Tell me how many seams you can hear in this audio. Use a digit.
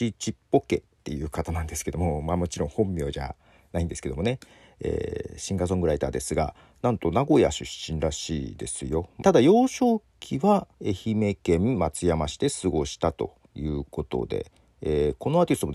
3